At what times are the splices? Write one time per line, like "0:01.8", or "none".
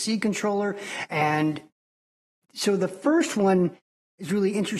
0:01.1